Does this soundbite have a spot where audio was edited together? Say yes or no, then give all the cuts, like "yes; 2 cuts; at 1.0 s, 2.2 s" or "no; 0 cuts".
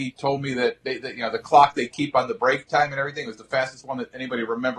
no; 0 cuts